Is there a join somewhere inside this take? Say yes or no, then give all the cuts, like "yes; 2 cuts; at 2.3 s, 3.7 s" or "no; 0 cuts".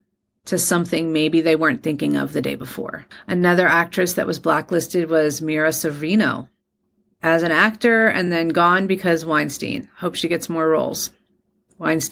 no; 0 cuts